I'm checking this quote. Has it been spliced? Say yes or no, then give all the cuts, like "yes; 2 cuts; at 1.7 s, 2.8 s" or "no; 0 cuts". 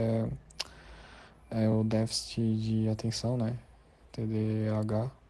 no; 0 cuts